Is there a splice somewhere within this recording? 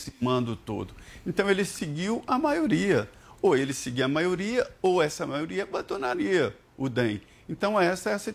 no; 0 cuts

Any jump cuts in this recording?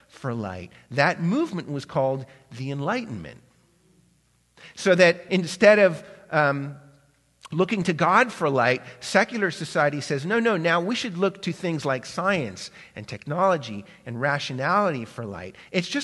no; 0 cuts

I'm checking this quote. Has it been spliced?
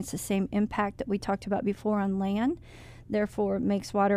no; 0 cuts

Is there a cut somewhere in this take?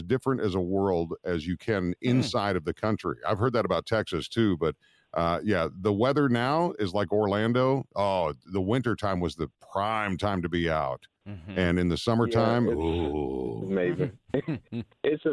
no; 0 cuts

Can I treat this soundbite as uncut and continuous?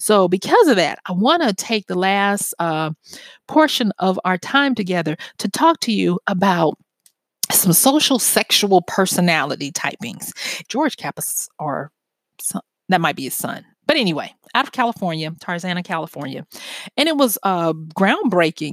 no; 1 cut; at 10.7 s

